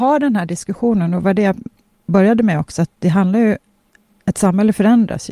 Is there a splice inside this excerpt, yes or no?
no